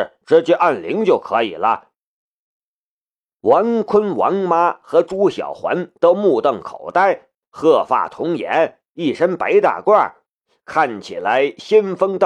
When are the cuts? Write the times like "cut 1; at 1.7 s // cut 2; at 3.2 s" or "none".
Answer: cut 1; at 7.4 s